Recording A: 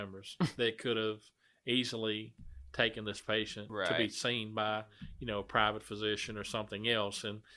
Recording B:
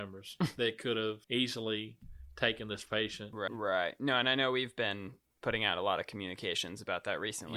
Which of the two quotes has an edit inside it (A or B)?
B